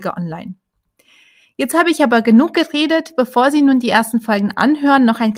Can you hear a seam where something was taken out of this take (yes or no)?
no